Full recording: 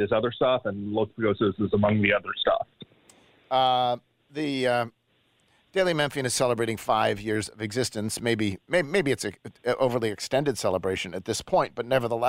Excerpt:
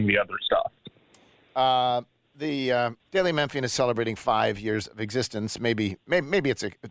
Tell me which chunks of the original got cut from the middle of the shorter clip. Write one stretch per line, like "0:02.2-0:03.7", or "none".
0:04.9-0:05.6